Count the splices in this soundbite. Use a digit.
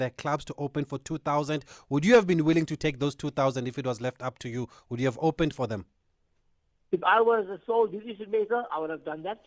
0